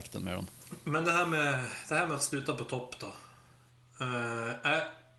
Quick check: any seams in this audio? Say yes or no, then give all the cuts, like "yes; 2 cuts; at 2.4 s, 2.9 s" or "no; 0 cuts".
no; 0 cuts